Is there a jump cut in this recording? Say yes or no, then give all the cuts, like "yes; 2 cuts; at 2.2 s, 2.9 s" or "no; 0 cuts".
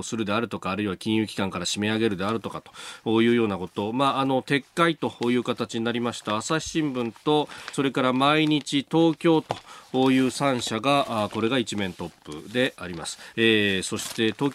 yes; 2 cuts; at 7.7 s, 13.3 s